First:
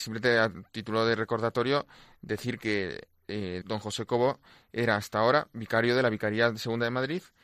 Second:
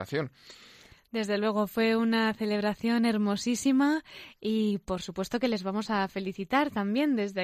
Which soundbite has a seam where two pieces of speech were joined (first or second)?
first